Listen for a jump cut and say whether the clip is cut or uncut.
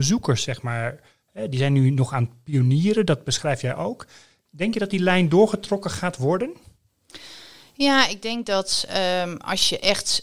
uncut